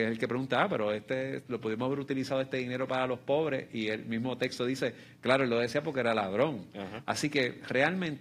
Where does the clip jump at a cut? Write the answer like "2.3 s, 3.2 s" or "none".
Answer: 7.0 s